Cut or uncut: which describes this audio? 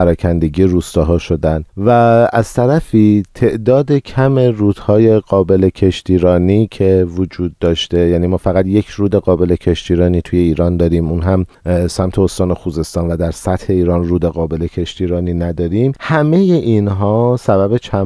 cut